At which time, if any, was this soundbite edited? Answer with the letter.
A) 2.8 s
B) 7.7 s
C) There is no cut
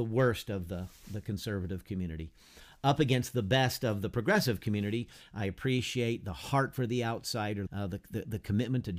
B